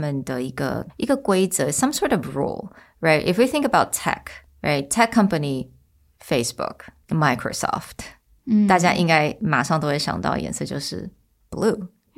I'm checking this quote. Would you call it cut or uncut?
uncut